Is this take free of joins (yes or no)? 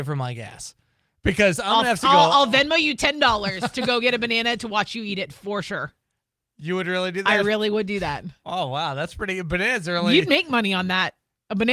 yes